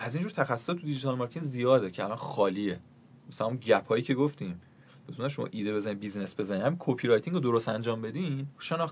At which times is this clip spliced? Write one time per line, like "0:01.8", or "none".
none